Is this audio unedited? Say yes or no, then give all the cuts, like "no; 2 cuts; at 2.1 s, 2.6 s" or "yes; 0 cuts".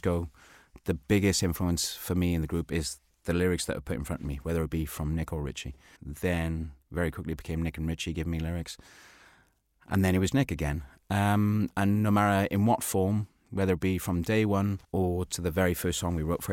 no; 3 cuts; at 6.0 s, 10.3 s, 14.8 s